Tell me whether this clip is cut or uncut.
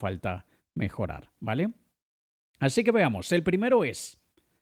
uncut